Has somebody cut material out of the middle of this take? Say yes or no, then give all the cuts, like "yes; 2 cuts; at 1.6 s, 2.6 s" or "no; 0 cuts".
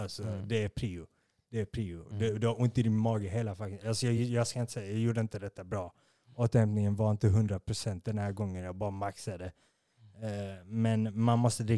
no; 0 cuts